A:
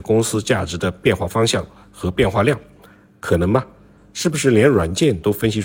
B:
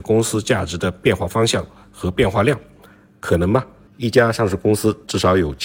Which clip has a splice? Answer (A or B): B